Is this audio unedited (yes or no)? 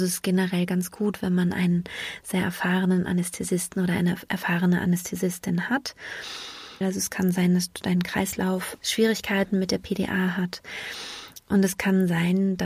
no